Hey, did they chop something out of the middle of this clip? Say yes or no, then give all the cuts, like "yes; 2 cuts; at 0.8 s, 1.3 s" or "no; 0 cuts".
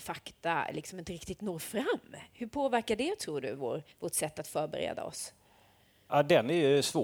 yes; 1 cut; at 3.9 s